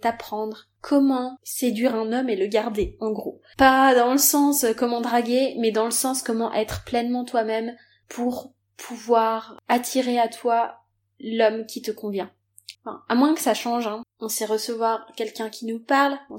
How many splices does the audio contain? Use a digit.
2